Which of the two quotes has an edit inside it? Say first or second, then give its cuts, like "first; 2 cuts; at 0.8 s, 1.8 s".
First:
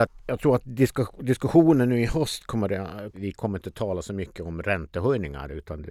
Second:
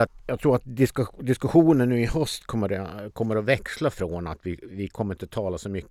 first; 1 cut; at 3.1 s